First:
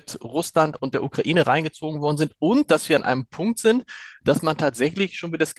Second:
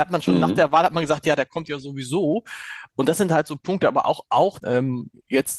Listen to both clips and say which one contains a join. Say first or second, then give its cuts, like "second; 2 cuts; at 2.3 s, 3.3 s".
second; 1 cut; at 4.6 s